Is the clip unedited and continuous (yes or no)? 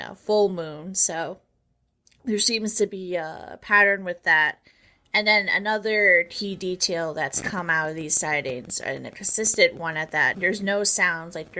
no